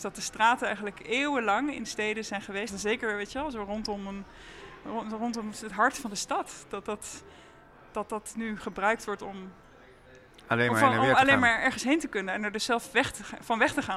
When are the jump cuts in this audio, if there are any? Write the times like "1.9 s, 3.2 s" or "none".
2.7 s